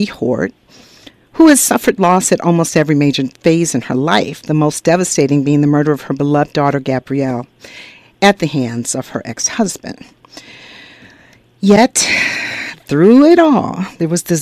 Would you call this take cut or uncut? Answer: uncut